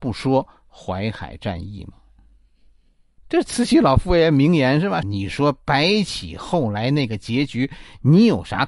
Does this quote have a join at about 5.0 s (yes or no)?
yes